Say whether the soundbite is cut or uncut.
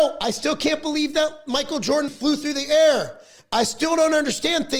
cut